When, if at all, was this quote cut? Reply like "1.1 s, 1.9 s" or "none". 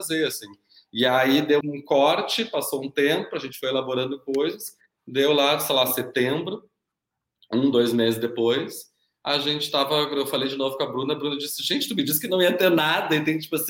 1.6 s

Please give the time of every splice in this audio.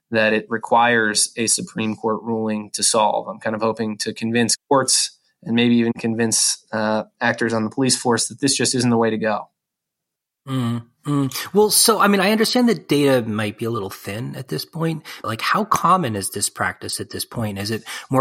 15.2 s

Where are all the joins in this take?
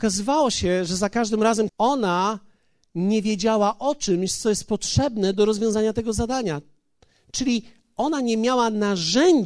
1.7 s

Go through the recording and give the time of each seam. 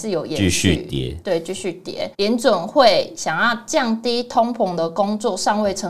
2.1 s

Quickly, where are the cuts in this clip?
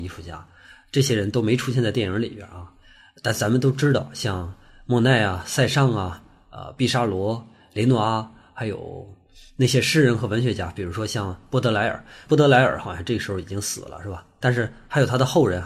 none

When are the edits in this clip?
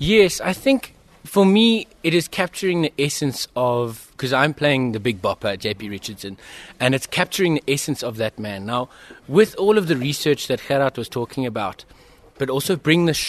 12.3 s

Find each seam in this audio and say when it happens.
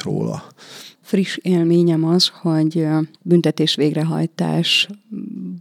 0.9 s, 3.1 s

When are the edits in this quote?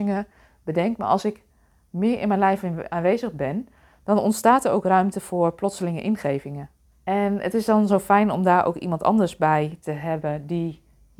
6.9 s

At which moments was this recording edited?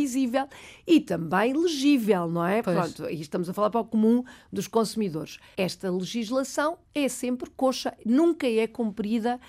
5.5 s

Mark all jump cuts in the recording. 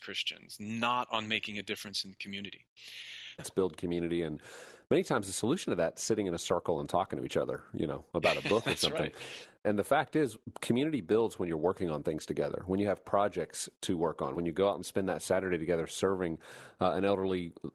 3.4 s, 14.3 s

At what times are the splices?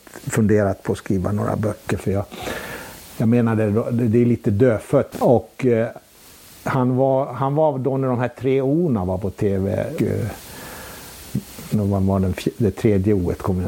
5.1 s, 10.0 s

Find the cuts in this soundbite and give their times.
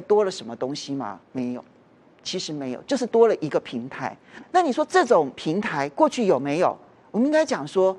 1.2 s, 4.4 s

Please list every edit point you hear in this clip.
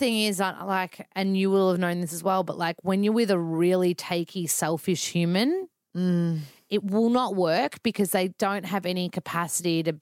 1.1 s

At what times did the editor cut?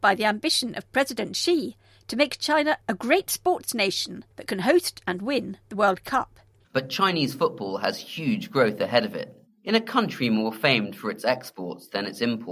6.6 s, 9.4 s

